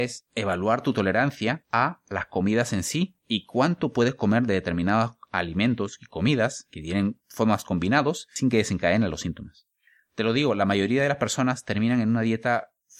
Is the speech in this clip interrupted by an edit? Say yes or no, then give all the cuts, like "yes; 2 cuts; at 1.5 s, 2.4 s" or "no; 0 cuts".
no; 0 cuts